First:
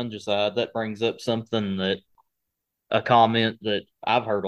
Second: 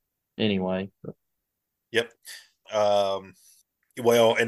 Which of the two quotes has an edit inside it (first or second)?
second